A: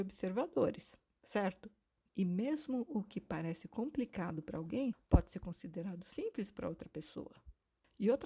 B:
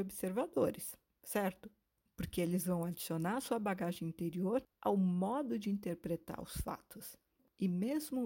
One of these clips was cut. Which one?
A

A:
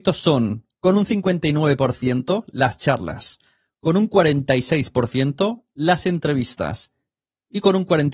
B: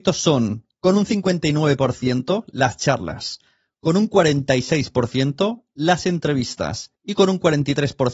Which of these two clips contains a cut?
B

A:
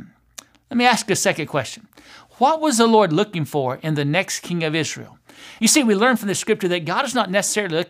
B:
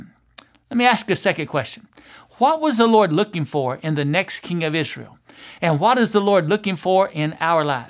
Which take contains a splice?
A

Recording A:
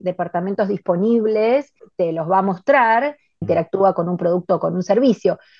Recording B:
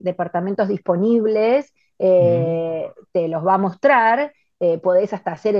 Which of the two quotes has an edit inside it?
A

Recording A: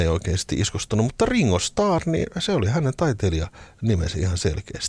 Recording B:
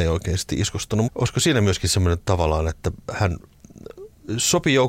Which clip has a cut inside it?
B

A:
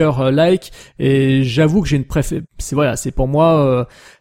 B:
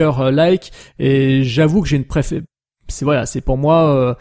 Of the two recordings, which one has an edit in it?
A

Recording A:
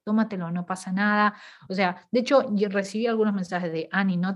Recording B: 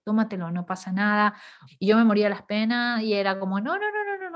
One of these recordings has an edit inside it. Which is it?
B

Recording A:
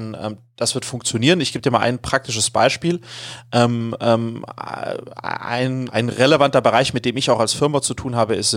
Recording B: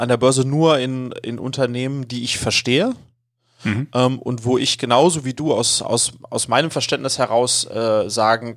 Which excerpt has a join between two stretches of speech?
A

